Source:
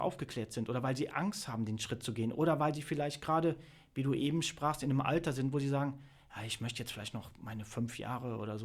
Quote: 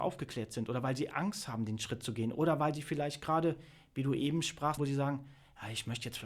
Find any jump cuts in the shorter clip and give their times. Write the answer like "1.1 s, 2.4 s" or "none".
4.8 s